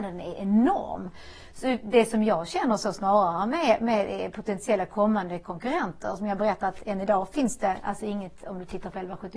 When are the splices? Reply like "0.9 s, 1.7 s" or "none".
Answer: none

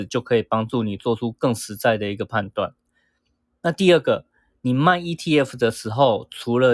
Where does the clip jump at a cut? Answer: none

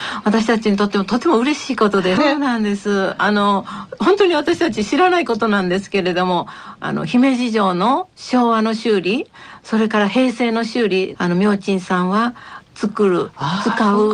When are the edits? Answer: 2.2 s, 11.1 s, 12.6 s

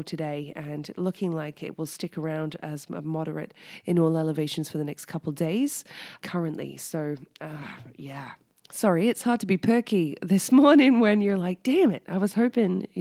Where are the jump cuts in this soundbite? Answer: 6.2 s

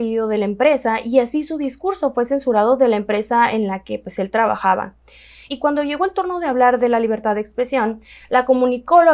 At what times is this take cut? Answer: 5.5 s

